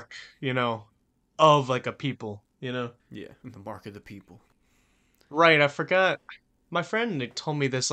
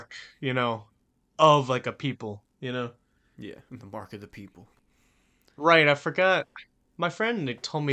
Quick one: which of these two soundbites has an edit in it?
first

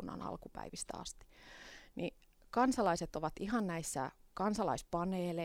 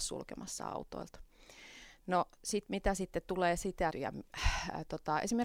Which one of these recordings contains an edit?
second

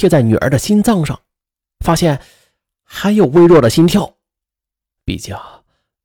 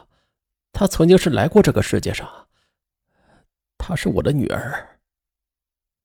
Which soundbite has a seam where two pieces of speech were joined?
first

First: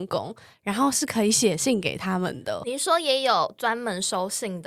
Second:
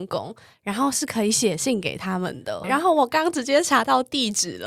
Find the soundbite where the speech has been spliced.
second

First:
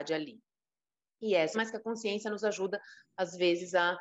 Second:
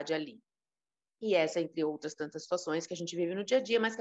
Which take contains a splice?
first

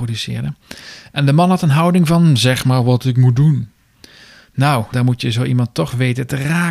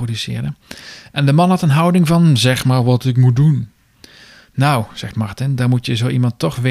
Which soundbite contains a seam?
first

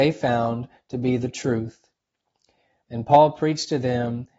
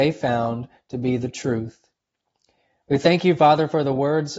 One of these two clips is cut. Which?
first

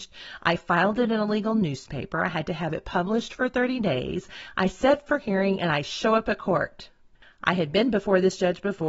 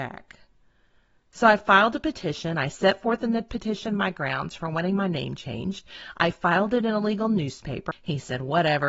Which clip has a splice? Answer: second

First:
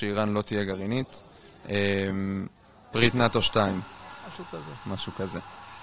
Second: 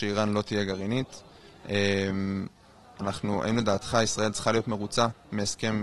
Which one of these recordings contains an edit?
first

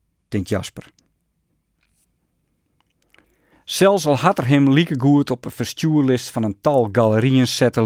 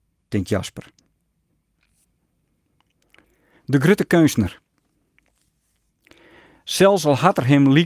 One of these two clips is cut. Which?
first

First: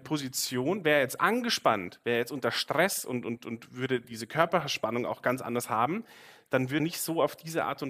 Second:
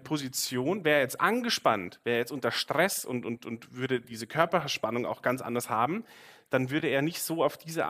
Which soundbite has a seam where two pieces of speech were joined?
first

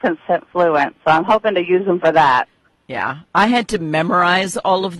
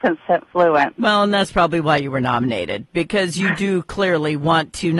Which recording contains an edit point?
second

